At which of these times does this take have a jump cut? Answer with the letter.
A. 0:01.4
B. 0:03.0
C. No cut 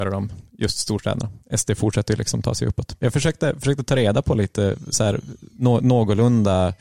A